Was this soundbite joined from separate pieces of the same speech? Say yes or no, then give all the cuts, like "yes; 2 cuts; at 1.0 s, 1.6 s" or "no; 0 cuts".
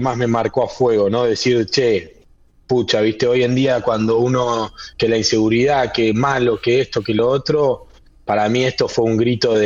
no; 0 cuts